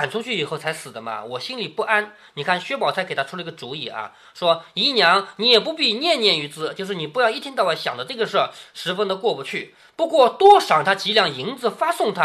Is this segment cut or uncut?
uncut